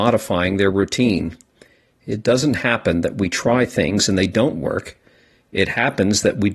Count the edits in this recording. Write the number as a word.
zero